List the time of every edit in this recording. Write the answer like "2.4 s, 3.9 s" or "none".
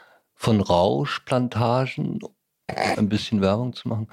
2.9 s